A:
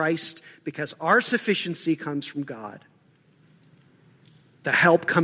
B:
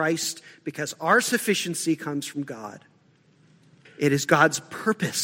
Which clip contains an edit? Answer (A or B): B